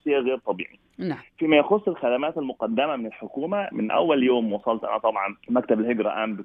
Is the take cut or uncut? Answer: cut